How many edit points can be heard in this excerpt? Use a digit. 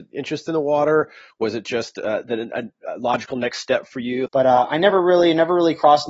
1